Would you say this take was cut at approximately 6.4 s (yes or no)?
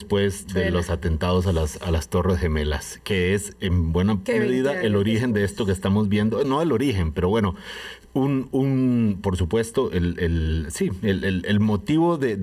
no